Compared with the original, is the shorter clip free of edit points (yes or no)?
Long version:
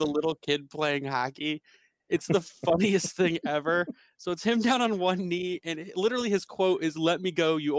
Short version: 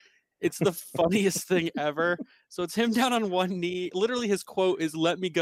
no